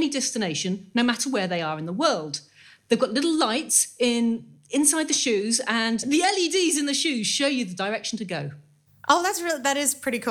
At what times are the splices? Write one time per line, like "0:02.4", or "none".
none